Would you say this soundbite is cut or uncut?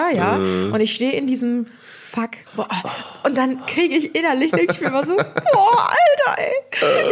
cut